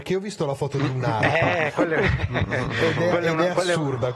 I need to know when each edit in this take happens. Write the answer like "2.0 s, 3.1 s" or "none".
1.7 s